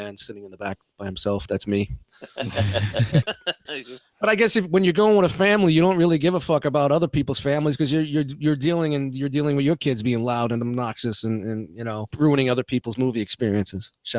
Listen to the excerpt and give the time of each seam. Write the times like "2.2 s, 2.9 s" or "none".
3.2 s